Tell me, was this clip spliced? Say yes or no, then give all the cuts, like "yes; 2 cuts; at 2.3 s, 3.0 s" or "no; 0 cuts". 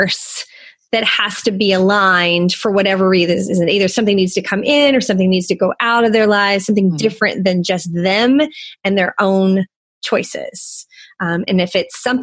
no; 0 cuts